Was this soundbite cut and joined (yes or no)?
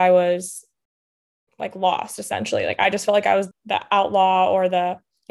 yes